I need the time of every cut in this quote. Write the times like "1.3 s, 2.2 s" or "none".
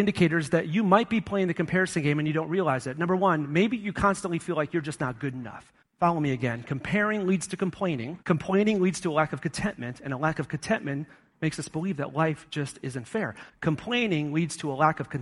5.8 s, 8.2 s, 13.5 s